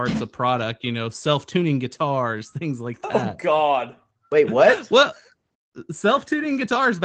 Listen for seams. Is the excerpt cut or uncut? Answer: uncut